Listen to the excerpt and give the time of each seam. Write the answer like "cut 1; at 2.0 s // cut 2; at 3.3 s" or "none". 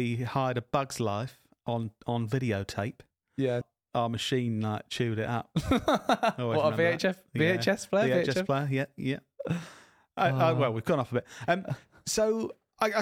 cut 1; at 3.6 s

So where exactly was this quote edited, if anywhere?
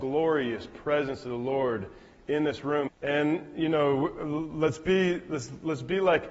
cut 1; at 2.9 s

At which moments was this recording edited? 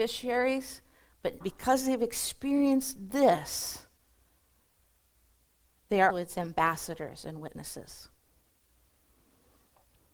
cut 1; at 1.4 s // cut 2; at 6.1 s

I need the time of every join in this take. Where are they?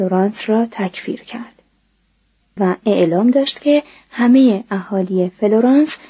cut 1; at 2.6 s

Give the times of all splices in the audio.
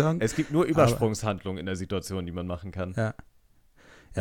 none

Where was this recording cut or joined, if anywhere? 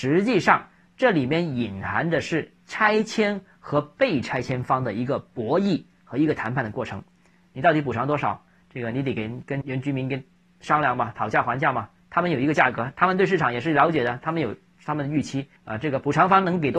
cut 1; at 9.6 s // cut 2; at 15.6 s

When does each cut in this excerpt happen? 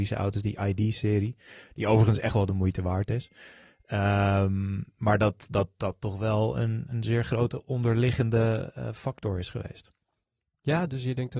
none

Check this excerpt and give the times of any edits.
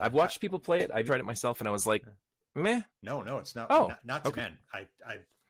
cut 1; at 1.1 s // cut 2; at 3.0 s // cut 3; at 4.4 s

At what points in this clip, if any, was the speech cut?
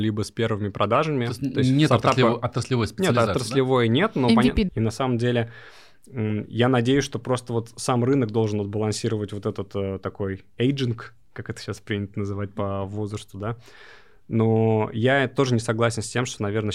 cut 1; at 4.7 s

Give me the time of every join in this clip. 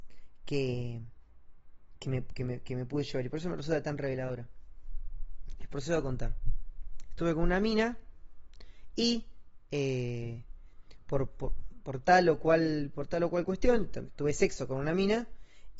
cut 1; at 14.0 s

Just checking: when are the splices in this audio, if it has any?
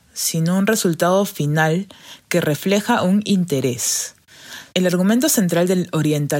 cut 1; at 4.7 s

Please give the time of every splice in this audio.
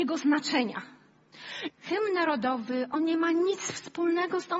cut 1; at 1.7 s

